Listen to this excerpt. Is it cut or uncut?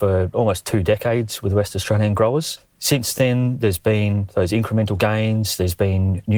uncut